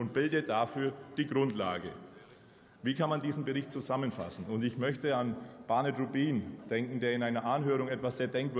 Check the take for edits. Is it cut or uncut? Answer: uncut